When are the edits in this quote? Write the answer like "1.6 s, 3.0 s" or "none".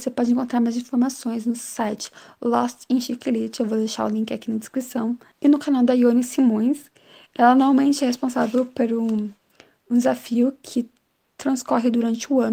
none